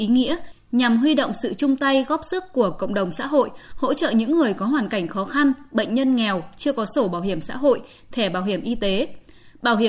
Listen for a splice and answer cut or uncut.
uncut